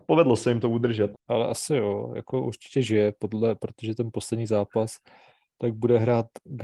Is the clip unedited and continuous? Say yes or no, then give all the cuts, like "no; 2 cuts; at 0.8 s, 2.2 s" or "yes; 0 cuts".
no; 1 cut; at 1.1 s